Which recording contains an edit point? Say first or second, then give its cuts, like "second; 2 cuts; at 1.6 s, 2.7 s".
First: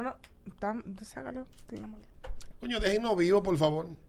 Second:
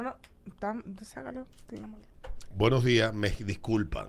first; 1 cut; at 2.5 s